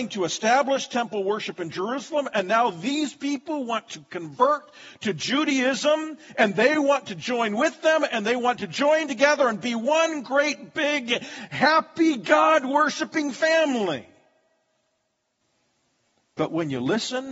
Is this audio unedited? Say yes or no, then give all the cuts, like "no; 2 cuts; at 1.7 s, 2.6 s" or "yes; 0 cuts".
yes; 0 cuts